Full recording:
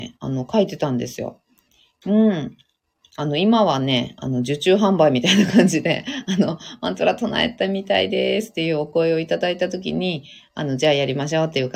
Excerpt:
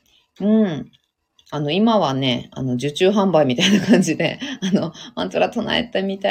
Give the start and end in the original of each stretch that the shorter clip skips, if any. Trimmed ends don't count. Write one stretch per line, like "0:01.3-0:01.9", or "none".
none